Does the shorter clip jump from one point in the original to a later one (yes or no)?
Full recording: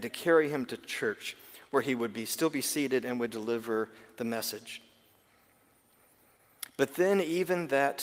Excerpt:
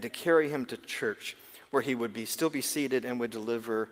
no